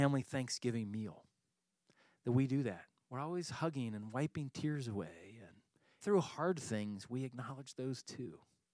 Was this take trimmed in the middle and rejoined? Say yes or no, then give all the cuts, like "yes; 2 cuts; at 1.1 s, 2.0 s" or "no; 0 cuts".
yes; 1 cut; at 6.0 s